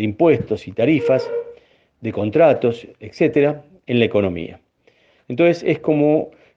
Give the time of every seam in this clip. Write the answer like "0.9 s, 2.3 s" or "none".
5.2 s